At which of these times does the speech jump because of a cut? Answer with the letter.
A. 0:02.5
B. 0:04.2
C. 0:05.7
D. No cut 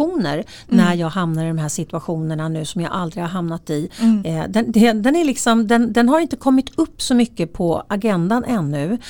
B